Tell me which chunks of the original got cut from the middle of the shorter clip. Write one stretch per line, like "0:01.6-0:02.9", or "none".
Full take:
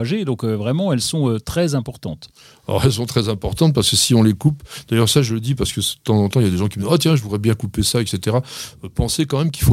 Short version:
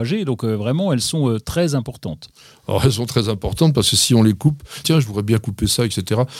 0:04.8-0:07.0